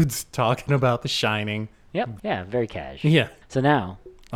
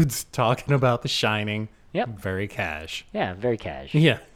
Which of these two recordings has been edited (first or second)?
first